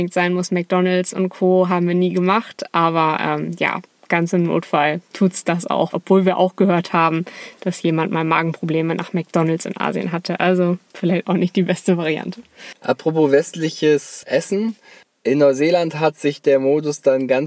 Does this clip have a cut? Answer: yes; 1 cut; at 5.9 s

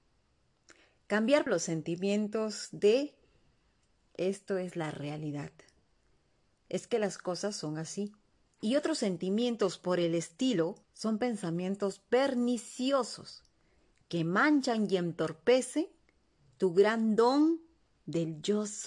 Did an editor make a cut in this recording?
yes; 3 cuts; at 1.5 s, 8.5 s, 10.8 s

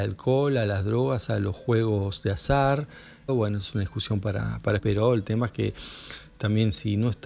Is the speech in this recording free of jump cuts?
no; 2 cuts; at 3.3 s, 4.8 s

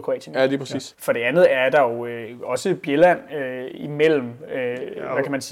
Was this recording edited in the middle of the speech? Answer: yes; 1 cut; at 0.9 s

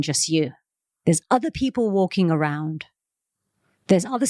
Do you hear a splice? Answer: no; 0 cuts

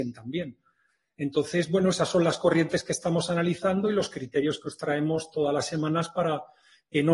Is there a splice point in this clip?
no; 0 cuts

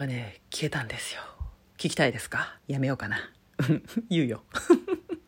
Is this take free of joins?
no; 1 cut; at 2.6 s

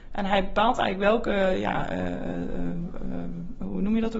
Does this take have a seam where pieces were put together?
no; 0 cuts

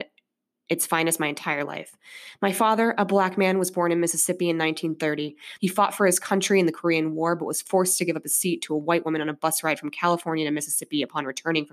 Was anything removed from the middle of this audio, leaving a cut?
yes; 1 cut; at 5.6 s

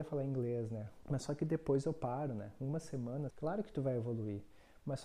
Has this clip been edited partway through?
yes; 2 cuts; at 1.0 s, 3.3 s

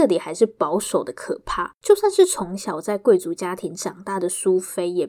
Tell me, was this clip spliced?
yes; 1 cut; at 1.8 s

